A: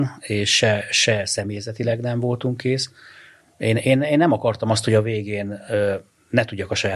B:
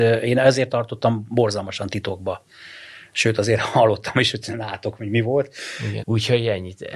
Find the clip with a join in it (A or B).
B